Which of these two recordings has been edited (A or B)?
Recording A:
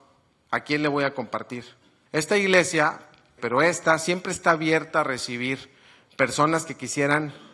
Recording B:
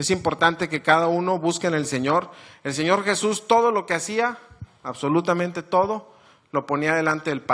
A